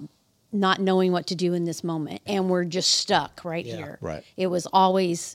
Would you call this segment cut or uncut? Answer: cut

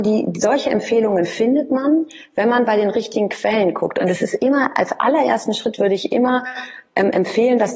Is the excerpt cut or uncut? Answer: uncut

